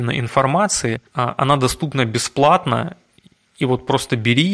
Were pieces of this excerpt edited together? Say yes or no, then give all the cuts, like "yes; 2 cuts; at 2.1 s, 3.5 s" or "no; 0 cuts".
yes; 1 cut; at 1.1 s